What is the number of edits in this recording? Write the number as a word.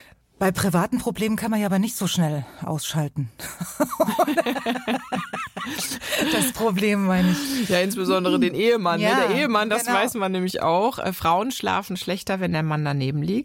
zero